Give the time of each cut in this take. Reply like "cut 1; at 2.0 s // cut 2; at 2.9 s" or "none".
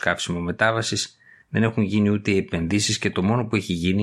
none